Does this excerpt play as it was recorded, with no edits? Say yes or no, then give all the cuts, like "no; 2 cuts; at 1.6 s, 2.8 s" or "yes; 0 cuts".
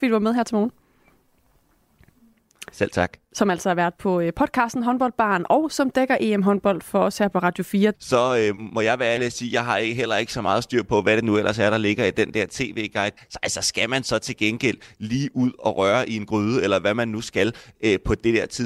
no; 2 cuts; at 7.9 s, 13.2 s